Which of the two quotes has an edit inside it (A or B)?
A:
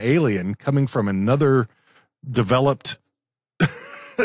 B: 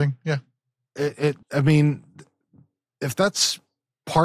B